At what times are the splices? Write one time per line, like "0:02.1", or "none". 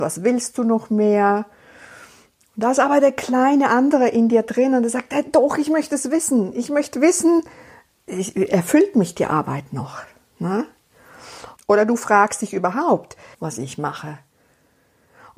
0:08.1
0:11.6
0:13.3